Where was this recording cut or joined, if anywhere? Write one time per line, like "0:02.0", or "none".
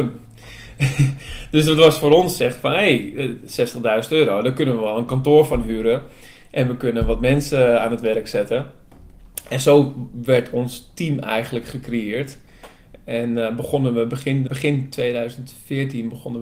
0:14.5